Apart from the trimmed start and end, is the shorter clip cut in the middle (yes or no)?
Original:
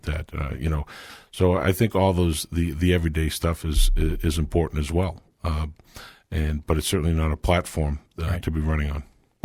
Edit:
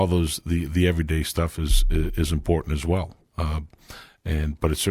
no